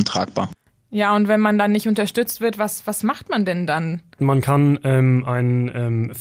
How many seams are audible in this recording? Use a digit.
1